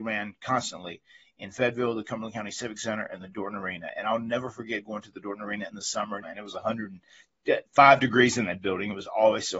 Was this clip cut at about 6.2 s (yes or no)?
yes